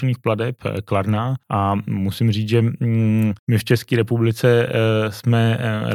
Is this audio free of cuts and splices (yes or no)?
no